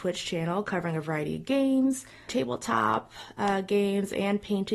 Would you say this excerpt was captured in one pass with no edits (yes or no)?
no